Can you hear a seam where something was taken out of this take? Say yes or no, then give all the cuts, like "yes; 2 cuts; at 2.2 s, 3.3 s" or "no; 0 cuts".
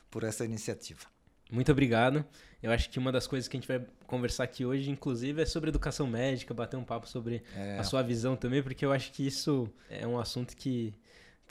no; 0 cuts